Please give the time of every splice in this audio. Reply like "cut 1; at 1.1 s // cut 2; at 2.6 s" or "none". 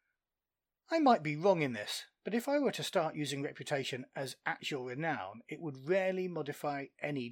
none